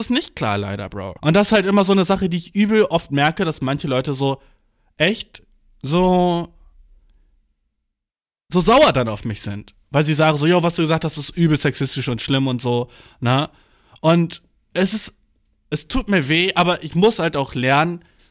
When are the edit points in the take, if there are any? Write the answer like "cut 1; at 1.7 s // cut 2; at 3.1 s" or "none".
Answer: cut 1; at 1.2 s